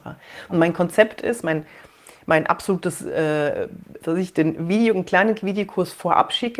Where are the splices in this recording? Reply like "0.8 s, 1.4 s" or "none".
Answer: 4.0 s